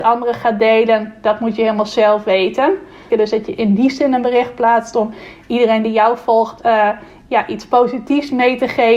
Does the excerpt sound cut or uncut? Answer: cut